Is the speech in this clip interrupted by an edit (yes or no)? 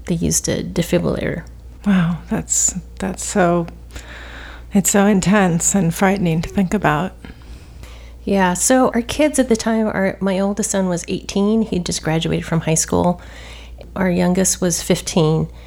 yes